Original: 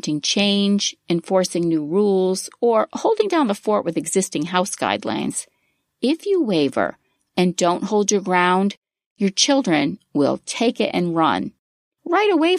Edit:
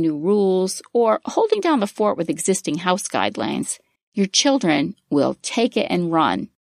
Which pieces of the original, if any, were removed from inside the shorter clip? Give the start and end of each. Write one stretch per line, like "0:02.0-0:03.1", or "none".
0:05.6-0:09.0